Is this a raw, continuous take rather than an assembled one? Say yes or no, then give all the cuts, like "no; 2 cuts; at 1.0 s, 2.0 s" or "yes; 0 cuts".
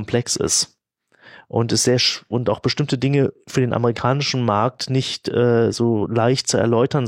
yes; 0 cuts